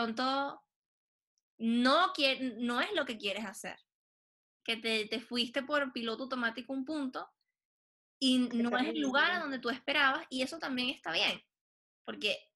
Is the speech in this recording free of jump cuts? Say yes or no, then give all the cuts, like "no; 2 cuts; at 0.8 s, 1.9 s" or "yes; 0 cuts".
yes; 0 cuts